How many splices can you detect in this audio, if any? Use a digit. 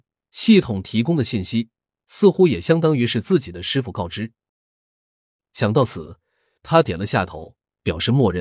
0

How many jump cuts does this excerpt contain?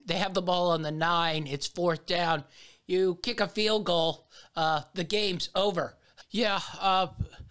1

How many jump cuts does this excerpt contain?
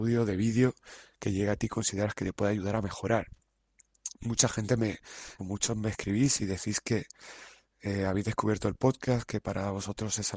1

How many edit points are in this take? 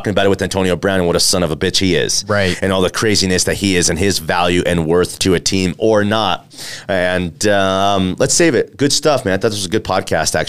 0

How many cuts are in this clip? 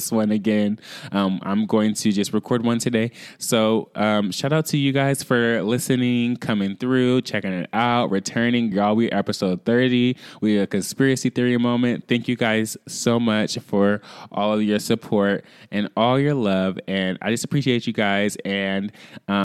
0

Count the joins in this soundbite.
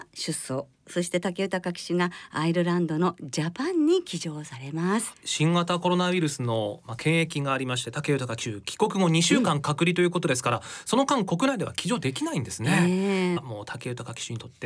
2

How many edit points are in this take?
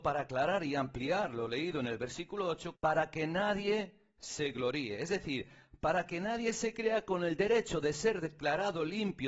1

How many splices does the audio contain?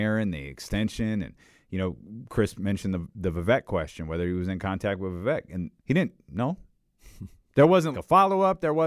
2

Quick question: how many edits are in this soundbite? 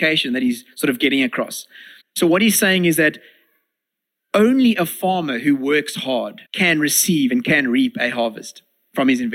2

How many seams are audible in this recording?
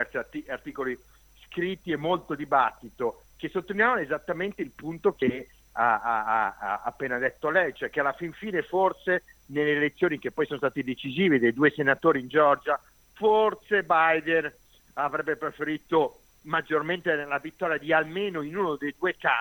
0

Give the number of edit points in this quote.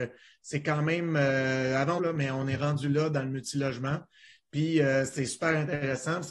1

